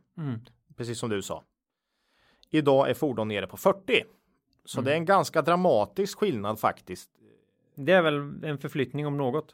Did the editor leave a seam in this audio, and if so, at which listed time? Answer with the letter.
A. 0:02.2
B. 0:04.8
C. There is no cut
C